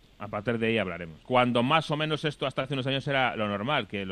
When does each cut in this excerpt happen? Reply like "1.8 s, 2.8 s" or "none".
1.2 s